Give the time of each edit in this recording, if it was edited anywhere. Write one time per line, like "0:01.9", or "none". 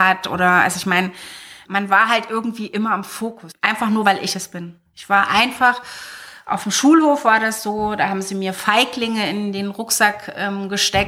0:03.5